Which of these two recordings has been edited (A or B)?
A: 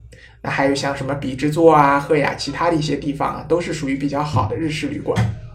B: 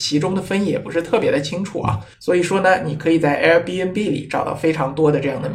B